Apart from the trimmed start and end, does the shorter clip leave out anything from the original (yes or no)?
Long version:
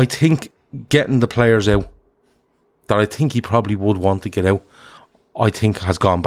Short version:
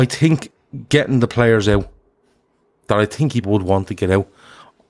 yes